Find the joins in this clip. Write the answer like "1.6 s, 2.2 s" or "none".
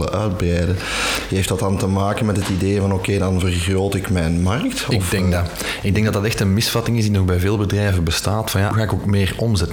8.7 s